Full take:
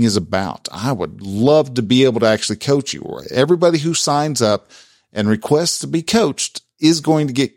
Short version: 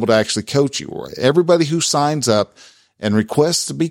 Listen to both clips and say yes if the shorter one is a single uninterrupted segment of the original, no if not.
yes